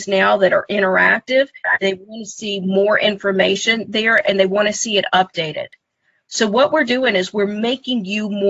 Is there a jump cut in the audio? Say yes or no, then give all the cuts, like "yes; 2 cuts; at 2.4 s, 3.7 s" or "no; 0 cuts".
no; 0 cuts